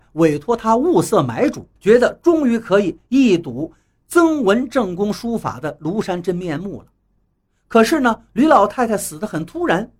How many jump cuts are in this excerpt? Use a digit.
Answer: 1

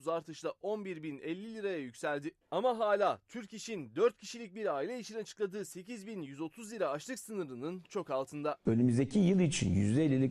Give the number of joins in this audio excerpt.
1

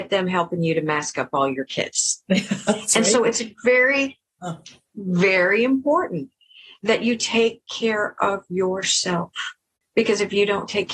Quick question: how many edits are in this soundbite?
0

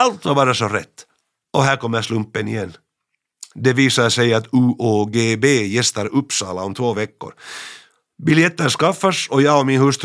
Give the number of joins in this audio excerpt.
1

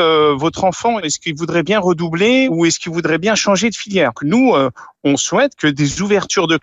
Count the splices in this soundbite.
1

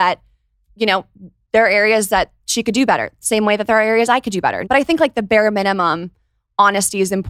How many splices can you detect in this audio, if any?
1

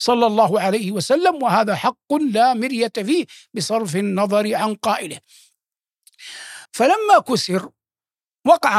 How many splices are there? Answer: 1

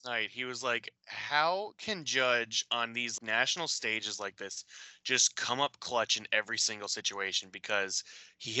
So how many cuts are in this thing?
2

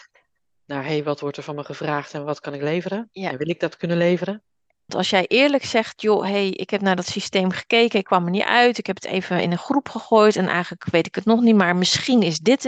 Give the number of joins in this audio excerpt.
1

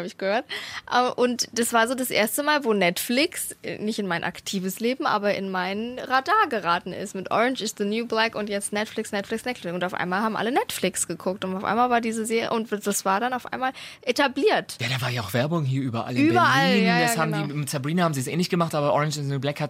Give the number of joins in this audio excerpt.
0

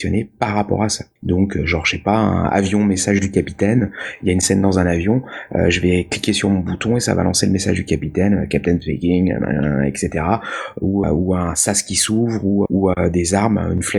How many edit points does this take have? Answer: 3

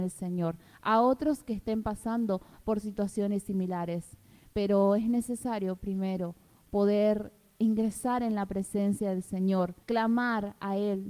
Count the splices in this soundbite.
1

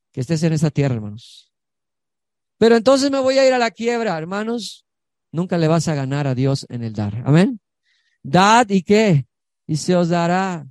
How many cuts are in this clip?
0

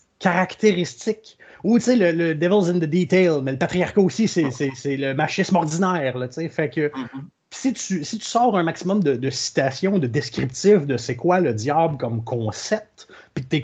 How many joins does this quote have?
0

